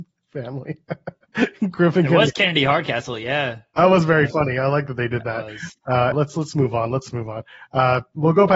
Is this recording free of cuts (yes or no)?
no